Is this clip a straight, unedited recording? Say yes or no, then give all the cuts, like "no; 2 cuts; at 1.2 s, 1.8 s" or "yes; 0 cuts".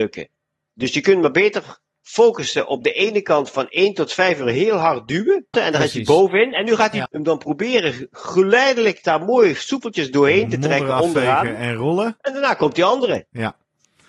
no; 2 cuts; at 5.5 s, 7.1 s